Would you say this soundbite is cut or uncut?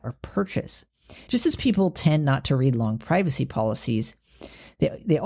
cut